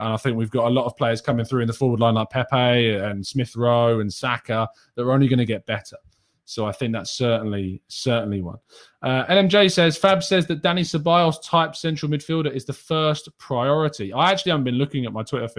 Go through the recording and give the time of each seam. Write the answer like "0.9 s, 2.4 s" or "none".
none